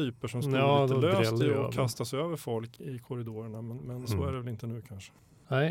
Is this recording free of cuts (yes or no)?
no